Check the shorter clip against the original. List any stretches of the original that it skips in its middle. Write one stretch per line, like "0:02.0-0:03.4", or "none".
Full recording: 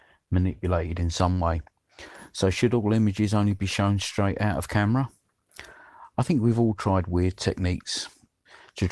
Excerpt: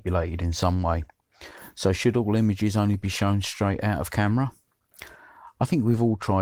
none

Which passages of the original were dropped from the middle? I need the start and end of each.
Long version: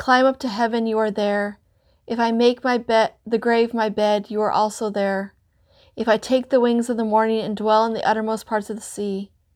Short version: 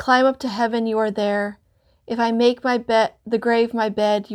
none

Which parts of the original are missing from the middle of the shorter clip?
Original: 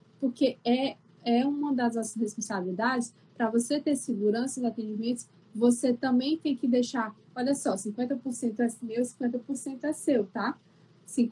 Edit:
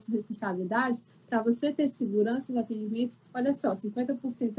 0:05.3-0:07.3

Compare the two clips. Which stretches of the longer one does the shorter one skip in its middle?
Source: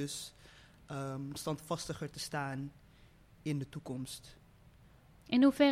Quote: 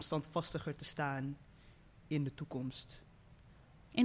none

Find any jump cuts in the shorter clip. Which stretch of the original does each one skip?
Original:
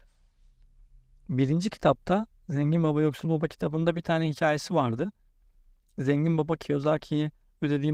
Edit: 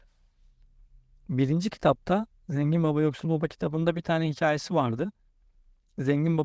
none

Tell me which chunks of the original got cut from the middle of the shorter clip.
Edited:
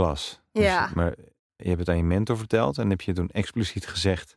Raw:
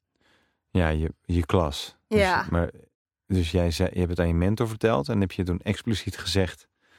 0:03.2-0:03.9

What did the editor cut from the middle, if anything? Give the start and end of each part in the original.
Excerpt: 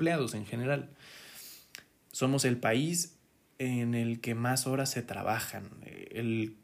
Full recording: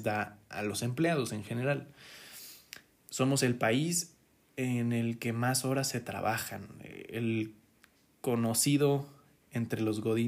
none

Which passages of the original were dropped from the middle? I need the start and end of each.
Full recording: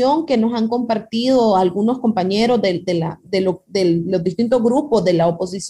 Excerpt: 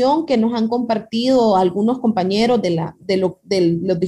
0:02.6-0:02.8

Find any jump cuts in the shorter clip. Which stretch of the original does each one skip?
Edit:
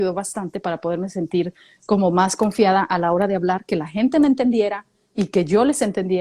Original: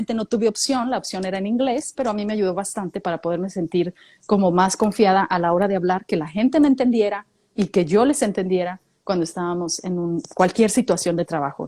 none

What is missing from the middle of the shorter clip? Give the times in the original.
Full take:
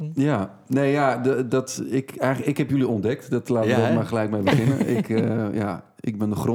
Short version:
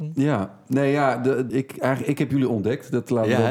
0:01.5-0:01.9

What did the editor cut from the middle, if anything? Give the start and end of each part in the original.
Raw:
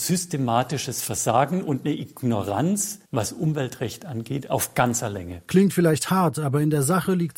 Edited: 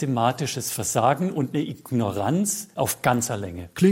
0:03.1-0:04.5

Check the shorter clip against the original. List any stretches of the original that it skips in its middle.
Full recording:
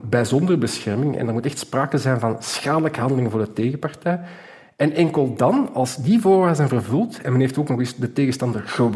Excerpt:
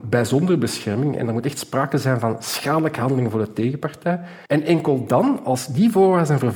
0:04.5-0:04.7

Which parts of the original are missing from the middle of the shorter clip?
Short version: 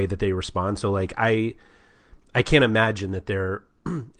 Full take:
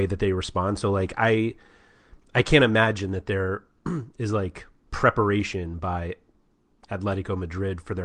none

